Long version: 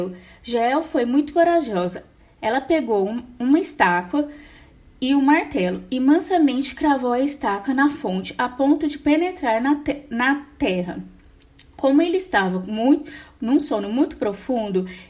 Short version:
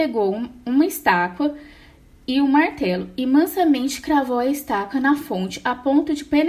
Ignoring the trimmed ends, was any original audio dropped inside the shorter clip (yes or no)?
no